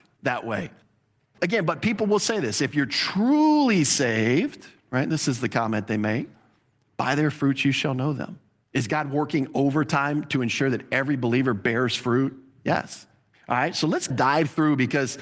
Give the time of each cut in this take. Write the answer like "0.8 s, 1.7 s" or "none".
8.6 s, 13.3 s